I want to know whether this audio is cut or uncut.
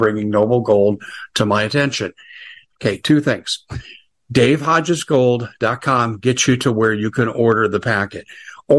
cut